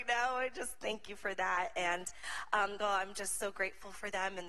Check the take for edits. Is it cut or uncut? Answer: cut